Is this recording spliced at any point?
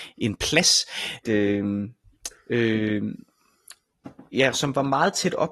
yes; 2 cuts; at 1.2 s, 4.5 s

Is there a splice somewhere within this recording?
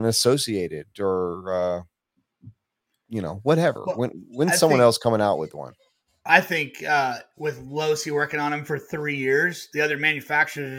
no; 0 cuts

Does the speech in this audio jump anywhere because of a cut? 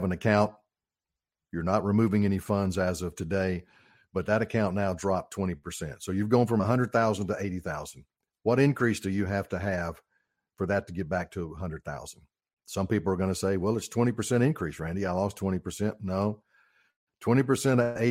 no; 0 cuts

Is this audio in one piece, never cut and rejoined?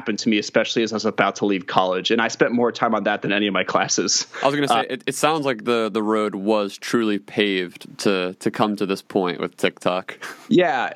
yes; 0 cuts

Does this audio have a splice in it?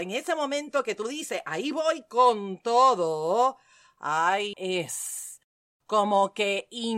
yes; 1 cut; at 4.5 s

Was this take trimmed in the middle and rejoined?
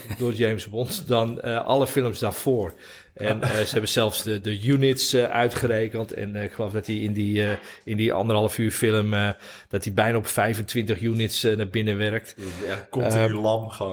yes; 1 cut; at 4.2 s

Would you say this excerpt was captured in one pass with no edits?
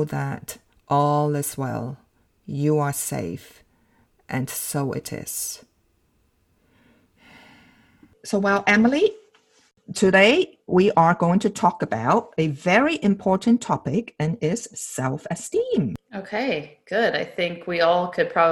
yes; 0 cuts

